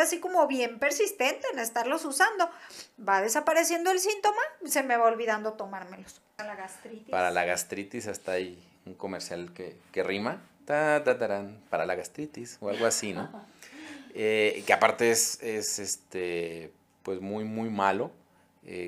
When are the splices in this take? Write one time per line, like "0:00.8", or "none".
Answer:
0:06.4